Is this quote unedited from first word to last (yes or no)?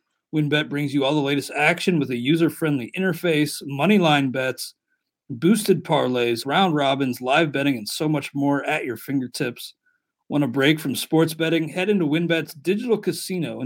no